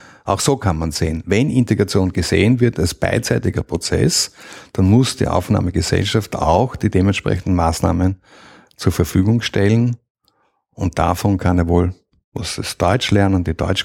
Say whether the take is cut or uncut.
uncut